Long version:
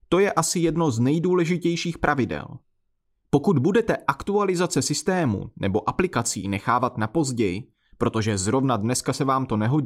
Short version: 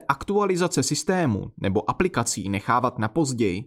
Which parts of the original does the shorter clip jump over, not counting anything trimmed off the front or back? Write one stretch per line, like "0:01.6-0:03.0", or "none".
none